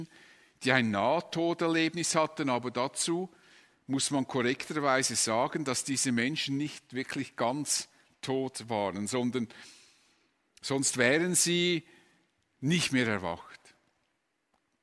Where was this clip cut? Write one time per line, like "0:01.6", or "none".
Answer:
none